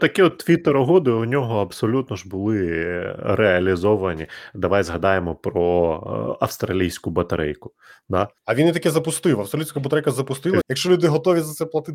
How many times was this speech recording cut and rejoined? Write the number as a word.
two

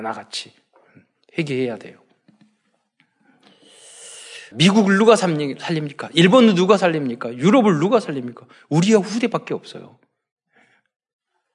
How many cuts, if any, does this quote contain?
one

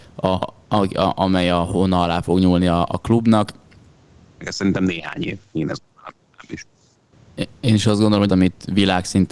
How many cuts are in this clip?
two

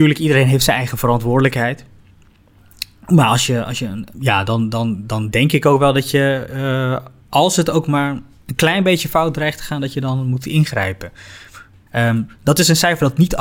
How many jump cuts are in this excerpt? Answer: two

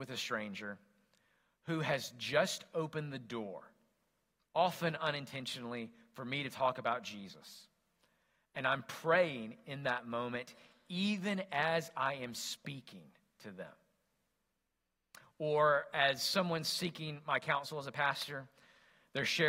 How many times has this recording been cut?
zero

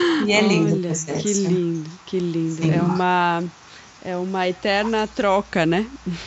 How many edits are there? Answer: zero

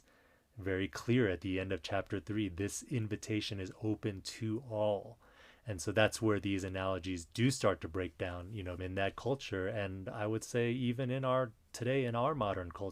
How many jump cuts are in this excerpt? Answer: one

